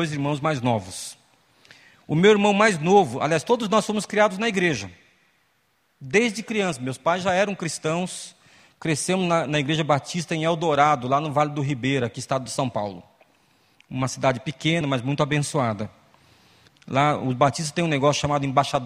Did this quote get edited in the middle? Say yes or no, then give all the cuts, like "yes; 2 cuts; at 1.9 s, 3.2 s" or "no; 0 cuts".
yes; 2 cuts; at 14.8 s, 16.7 s